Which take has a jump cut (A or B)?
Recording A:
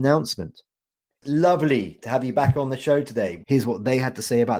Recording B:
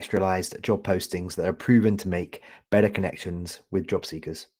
A